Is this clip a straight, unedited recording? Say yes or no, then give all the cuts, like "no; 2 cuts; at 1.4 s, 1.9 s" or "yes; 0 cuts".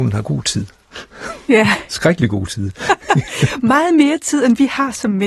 yes; 0 cuts